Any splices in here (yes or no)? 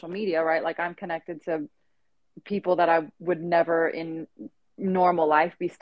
no